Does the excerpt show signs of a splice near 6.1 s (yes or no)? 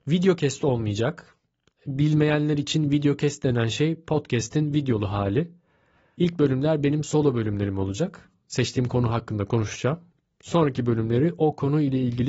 yes